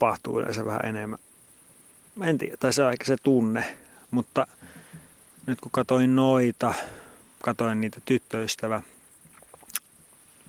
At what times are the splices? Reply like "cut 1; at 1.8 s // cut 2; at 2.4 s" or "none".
none